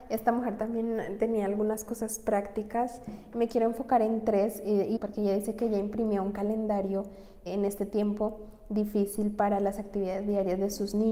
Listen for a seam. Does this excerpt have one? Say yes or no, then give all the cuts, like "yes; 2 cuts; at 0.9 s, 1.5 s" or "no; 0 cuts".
yes; 2 cuts; at 5.0 s, 7.5 s